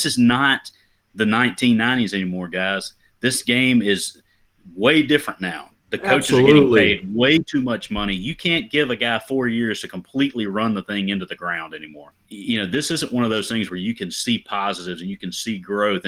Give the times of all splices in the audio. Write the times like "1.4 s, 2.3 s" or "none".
none